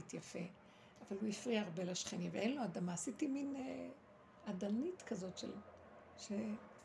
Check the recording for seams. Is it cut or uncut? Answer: uncut